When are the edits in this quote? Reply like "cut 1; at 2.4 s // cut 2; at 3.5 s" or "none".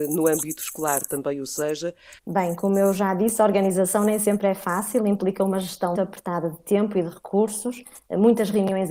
cut 1; at 2.2 s // cut 2; at 5.9 s